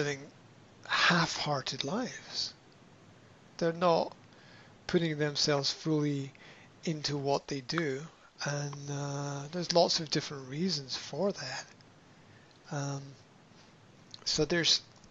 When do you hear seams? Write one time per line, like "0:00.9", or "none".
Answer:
none